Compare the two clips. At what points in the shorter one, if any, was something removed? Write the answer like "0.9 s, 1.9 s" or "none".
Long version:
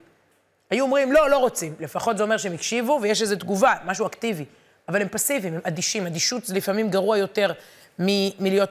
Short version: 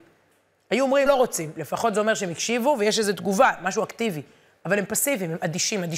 1.1 s